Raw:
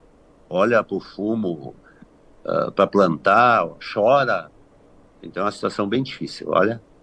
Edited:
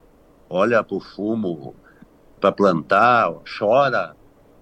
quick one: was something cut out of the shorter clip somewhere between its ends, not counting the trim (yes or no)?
yes